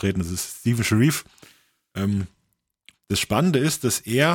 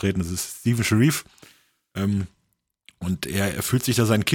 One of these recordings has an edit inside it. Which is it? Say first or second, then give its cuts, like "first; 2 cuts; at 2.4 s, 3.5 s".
first; 1 cut; at 2.9 s